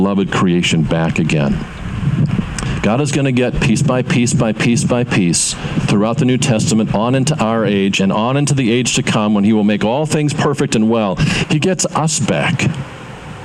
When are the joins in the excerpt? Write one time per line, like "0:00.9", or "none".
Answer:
0:11.4